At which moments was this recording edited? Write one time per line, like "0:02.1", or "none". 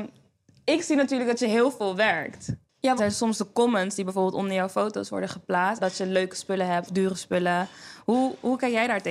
0:03.0
0:05.8
0:06.9